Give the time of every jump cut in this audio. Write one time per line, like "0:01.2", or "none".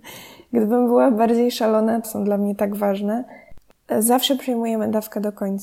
0:02.0